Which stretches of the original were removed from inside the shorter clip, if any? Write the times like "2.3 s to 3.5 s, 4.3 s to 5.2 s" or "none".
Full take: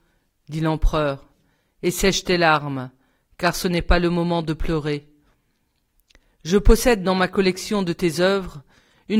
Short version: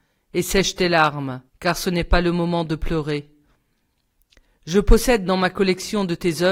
3.0 s to 3.3 s